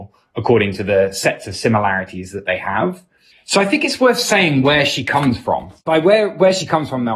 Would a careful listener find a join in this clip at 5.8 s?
no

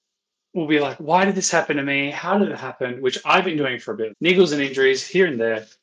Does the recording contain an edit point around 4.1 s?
yes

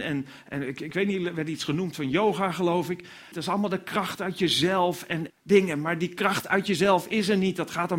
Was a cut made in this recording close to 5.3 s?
yes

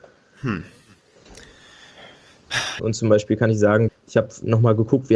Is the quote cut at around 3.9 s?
yes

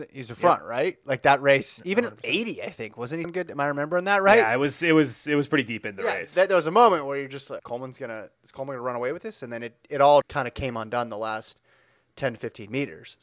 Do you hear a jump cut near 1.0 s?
no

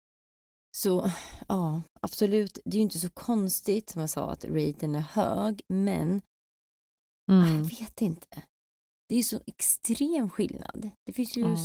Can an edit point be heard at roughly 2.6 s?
no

